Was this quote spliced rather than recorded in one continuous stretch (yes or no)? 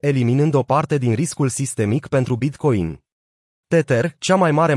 yes